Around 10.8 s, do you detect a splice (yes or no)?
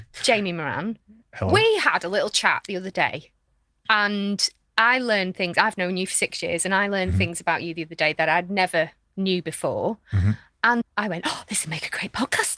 yes